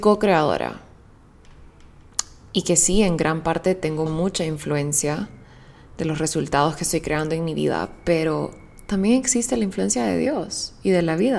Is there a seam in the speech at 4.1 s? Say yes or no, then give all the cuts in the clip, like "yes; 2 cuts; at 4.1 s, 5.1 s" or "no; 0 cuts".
yes; 1 cut; at 4.1 s